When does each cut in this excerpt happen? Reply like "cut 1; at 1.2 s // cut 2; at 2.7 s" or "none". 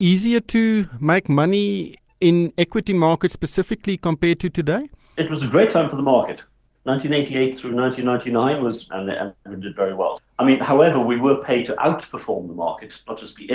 cut 1; at 8.9 s // cut 2; at 10.2 s